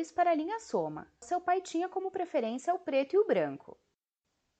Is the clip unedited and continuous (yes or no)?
no